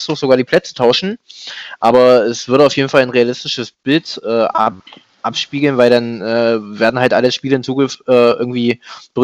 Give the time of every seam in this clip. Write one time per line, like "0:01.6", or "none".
none